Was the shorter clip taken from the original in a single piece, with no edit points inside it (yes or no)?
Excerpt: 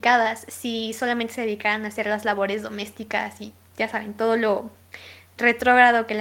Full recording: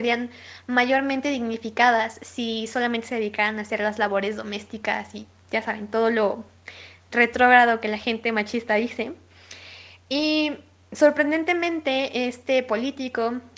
yes